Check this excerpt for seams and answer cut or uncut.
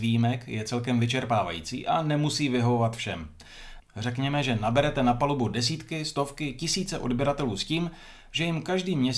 cut